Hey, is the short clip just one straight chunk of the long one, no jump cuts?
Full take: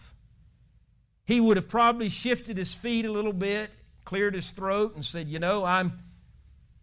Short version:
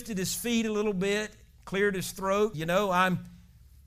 no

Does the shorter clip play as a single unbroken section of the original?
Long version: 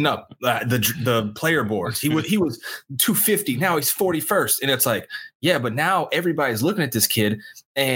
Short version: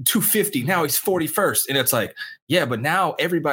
yes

